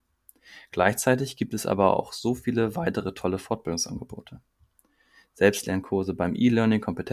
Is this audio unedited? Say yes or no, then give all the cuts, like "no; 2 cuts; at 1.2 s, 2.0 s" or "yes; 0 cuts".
yes; 0 cuts